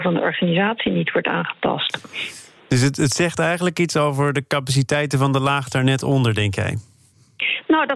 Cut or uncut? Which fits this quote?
uncut